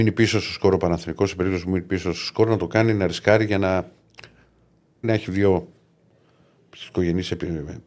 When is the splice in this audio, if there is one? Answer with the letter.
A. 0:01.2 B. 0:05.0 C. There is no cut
B